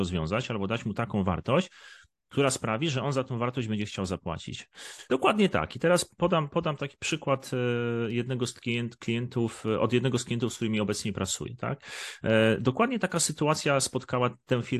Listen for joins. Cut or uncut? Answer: cut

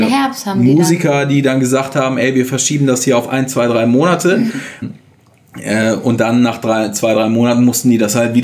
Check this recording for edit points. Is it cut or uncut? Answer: cut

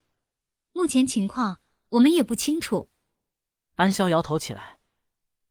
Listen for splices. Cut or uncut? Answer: cut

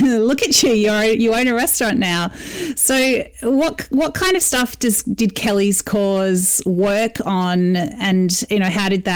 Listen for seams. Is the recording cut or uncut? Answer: uncut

